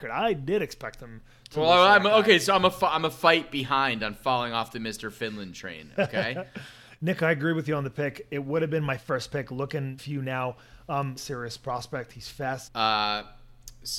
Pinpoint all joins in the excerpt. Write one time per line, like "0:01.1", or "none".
0:10.0
0:11.2
0:12.7